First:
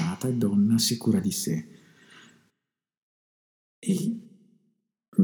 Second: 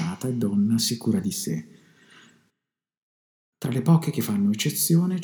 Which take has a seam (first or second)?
second